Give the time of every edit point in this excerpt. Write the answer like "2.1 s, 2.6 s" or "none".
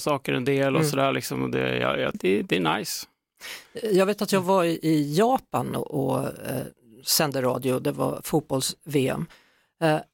2.1 s